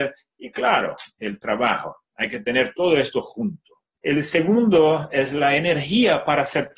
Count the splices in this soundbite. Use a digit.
1